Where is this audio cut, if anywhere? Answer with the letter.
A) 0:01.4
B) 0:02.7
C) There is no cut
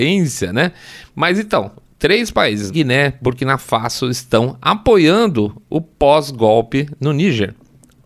B